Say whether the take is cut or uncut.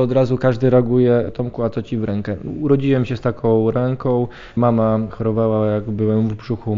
uncut